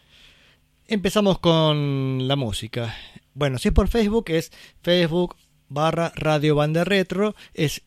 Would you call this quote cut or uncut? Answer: cut